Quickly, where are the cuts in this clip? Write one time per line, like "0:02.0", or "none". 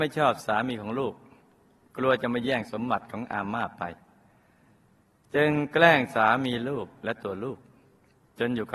none